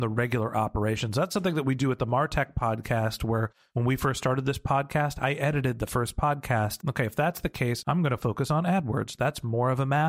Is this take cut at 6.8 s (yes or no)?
yes